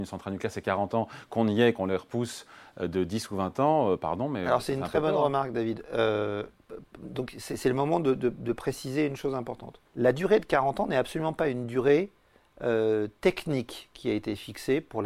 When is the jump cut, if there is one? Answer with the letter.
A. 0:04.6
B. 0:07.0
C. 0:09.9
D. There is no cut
C